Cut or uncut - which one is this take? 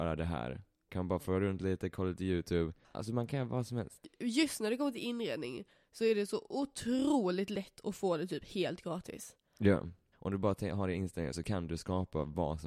cut